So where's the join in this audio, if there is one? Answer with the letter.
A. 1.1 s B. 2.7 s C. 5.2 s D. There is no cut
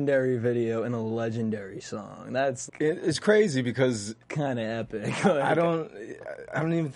B